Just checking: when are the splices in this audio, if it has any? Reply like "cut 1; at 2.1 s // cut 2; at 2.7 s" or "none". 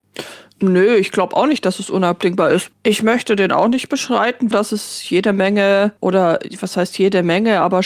cut 1; at 2.7 s // cut 2; at 4.5 s // cut 3; at 6.0 s